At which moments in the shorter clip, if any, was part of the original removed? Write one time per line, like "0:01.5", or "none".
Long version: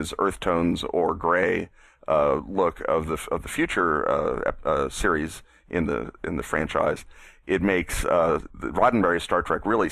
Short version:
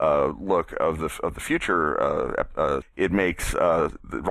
0:02.8

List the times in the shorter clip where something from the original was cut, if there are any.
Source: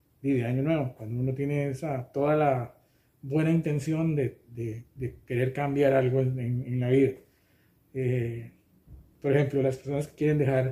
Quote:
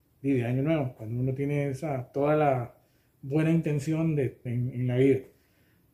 0:04.5

